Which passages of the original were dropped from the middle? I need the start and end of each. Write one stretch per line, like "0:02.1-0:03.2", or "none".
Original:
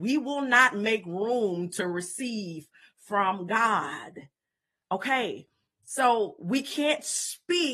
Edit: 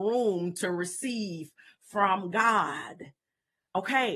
none